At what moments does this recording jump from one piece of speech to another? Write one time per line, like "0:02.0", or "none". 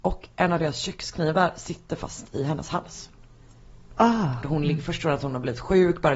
0:04.4